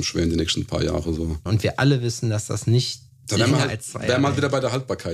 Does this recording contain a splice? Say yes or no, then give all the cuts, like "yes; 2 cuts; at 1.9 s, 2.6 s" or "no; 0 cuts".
yes; 1 cut; at 1.5 s